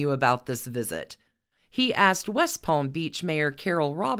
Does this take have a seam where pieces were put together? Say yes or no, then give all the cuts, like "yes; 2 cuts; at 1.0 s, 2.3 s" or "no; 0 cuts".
yes; 1 cut; at 1.6 s